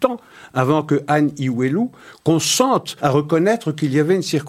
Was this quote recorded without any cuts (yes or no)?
no